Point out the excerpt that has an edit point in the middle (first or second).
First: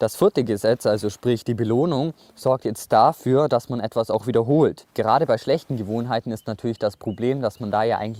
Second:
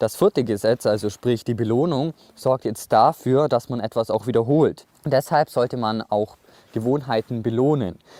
first